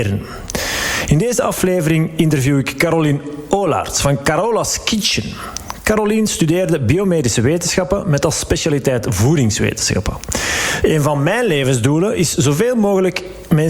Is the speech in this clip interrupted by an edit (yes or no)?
yes